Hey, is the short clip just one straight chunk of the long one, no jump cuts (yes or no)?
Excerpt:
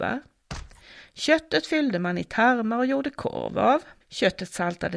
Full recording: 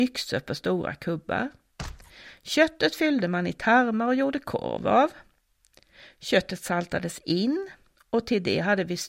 no